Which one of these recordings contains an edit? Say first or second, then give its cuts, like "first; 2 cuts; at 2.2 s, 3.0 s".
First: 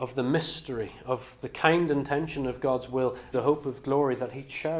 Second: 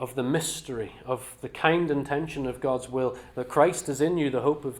first; 1 cut; at 3.3 s